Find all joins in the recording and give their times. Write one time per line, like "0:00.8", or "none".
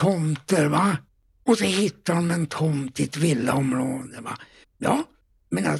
0:04.6

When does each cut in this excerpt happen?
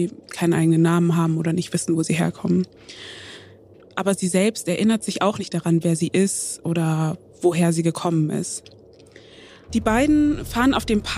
0:03.8
0:09.7

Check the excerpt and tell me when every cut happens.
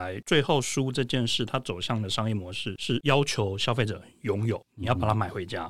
none

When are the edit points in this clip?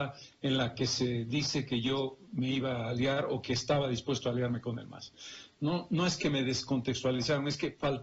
0:05.6

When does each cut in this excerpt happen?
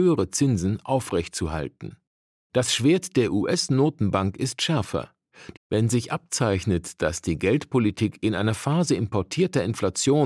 0:02.4
0:05.5

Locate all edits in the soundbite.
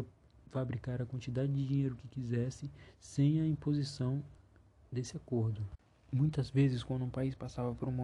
none

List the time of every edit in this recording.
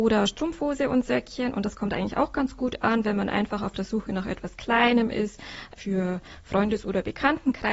none

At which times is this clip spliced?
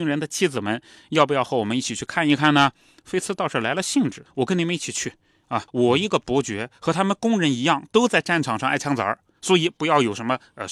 0:04.3
0:05.7

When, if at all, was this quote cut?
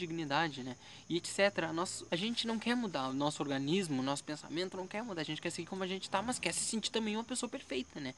0:02.1

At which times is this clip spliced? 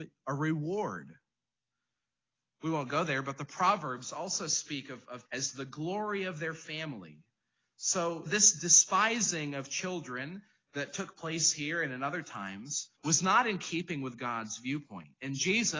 0:05.2
0:08.3
0:13.0

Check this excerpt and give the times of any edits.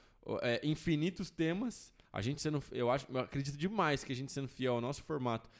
0:02.0

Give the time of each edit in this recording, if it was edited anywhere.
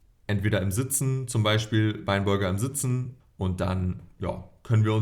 0:03.2

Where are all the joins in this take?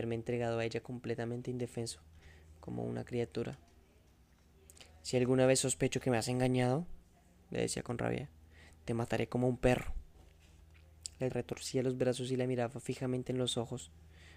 0:11.3

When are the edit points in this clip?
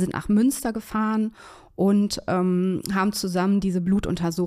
none

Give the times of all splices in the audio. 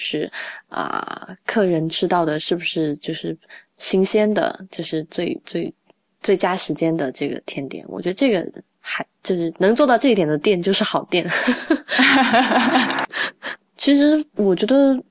none

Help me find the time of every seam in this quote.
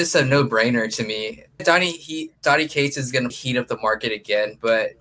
0:01.6
0:03.3

